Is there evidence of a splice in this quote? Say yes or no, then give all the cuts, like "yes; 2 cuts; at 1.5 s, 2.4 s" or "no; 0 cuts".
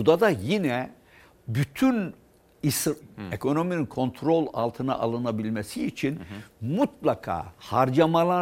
yes; 1 cut; at 3.0 s